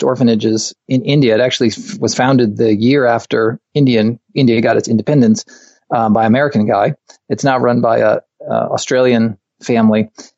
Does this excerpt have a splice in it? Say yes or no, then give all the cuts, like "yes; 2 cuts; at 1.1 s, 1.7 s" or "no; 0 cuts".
no; 0 cuts